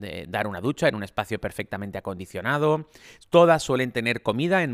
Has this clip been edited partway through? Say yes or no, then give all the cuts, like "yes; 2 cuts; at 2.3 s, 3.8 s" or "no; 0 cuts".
no; 0 cuts